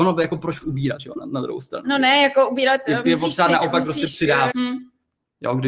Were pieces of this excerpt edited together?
yes; 1 cut; at 4.5 s

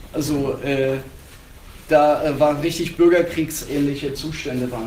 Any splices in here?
yes; 1 cut; at 1.8 s

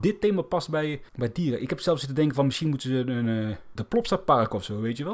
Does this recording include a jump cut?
yes; 2 cuts; at 1.1 s, 3.8 s

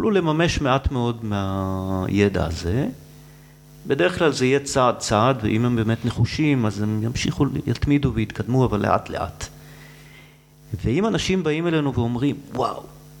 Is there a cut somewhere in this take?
no; 0 cuts

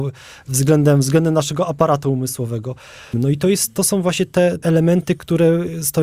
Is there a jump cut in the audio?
yes; 1 cut; at 3.1 s

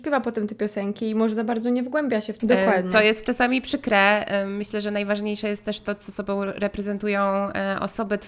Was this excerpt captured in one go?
no; 1 cut; at 2.4 s

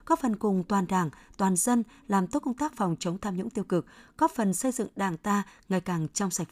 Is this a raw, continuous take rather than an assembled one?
yes; 0 cuts

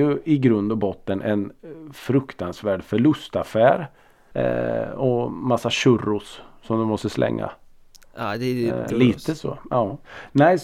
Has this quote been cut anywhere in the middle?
yes; 2 cuts; at 4.3 s, 8.9 s

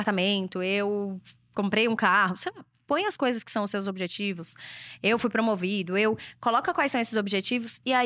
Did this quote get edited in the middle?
no; 0 cuts

